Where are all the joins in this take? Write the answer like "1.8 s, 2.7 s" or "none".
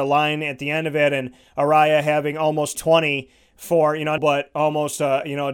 2.7 s, 4.2 s

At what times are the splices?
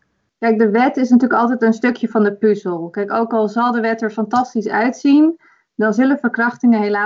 none

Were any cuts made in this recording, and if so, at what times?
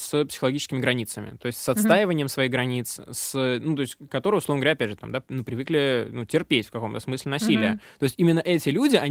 none

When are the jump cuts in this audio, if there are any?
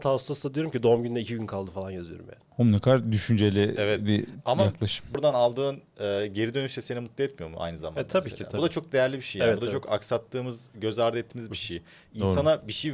2.5 s

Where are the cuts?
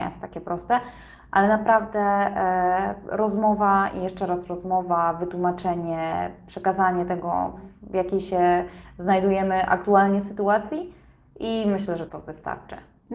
12.1 s

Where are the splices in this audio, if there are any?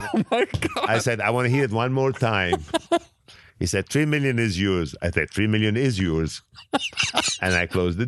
none

